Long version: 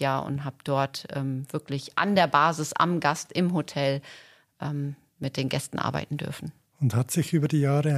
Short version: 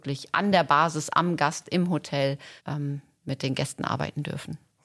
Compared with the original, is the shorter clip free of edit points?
no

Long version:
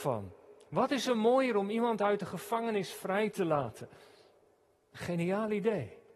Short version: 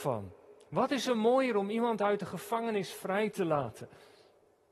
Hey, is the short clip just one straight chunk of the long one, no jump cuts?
yes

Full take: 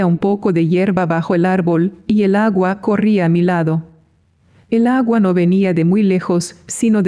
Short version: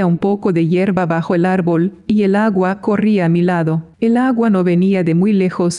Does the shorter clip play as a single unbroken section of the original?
no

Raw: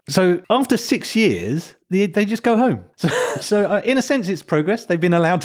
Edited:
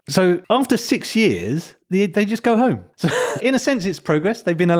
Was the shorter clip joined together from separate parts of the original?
yes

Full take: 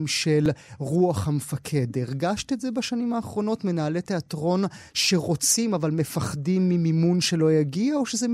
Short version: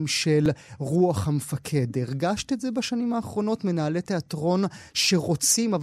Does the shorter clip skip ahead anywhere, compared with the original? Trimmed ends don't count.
no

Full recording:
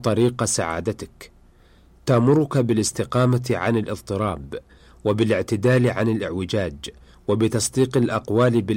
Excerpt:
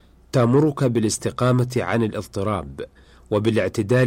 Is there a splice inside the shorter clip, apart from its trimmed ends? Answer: no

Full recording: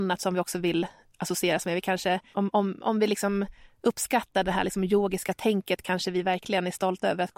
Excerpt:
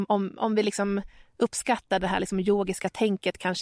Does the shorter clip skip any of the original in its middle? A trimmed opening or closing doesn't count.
no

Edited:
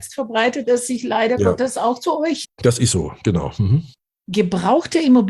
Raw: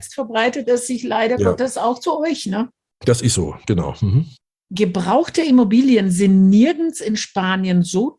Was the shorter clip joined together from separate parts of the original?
yes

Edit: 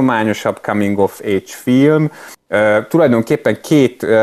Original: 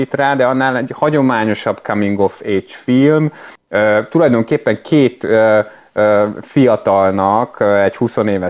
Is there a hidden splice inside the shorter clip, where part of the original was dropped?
no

